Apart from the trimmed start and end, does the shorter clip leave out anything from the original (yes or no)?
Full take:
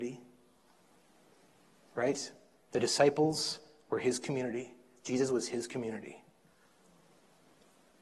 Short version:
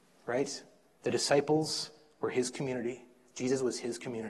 no